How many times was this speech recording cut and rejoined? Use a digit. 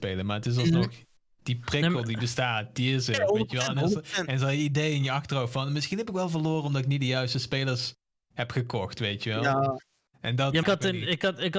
1